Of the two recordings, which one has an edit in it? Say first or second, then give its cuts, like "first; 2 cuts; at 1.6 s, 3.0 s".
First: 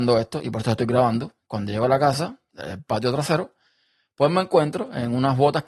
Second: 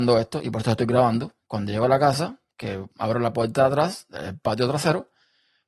first; 1 cut; at 2.5 s